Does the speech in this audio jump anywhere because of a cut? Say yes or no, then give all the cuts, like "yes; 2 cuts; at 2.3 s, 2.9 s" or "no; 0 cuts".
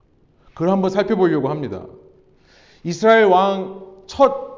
no; 0 cuts